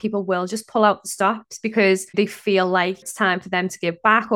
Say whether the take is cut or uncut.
cut